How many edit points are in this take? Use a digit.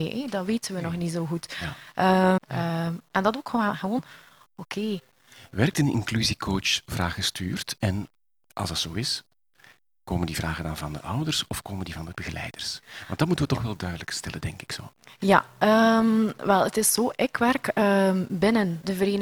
2